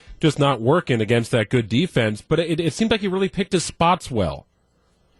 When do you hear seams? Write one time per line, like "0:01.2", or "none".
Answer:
0:02.2